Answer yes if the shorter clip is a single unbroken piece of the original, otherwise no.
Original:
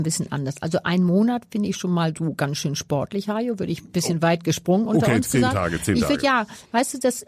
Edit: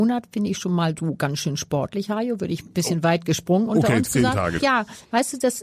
no